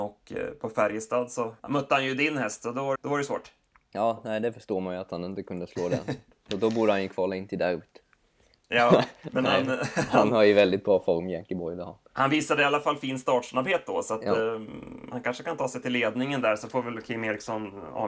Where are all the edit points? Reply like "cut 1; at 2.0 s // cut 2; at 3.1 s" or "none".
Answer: cut 1; at 1.6 s // cut 2; at 2.9 s